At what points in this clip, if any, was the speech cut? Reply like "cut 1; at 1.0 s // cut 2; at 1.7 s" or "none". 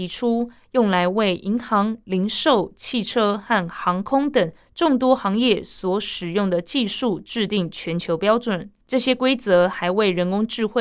cut 1; at 8.8 s